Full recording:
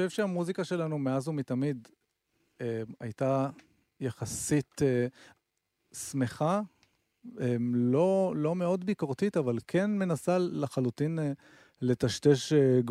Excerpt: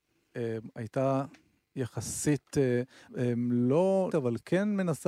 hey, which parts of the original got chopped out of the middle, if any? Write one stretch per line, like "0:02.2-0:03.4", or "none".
0:05.3-0:07.3
0:08.3-0:09.3